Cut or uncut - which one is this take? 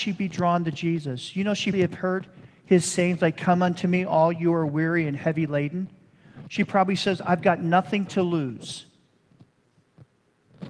cut